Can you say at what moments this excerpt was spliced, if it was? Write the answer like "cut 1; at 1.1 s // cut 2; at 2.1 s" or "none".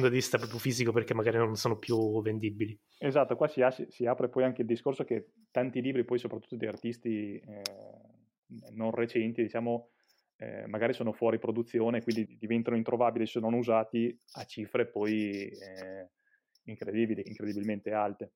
cut 1; at 12.3 s // cut 2; at 17.2 s